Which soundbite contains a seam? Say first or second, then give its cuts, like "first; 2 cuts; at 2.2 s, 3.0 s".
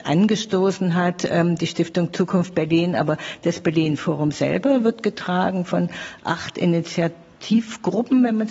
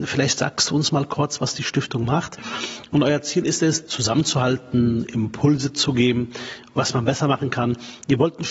second; 1 cut; at 3.9 s